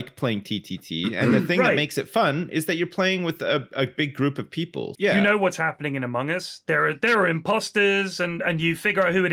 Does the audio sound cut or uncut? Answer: cut